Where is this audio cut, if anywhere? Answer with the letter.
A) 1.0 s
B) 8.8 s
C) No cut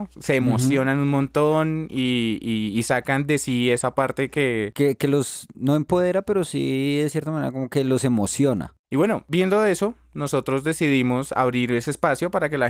C